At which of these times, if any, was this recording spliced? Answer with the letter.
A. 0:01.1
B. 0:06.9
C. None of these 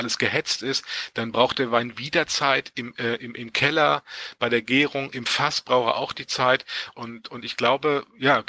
B